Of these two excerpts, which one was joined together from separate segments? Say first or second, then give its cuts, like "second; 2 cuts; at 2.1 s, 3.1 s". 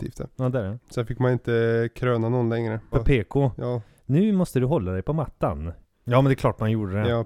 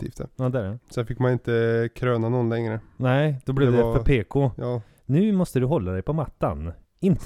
first; 2 cuts; at 2.9 s, 5.9 s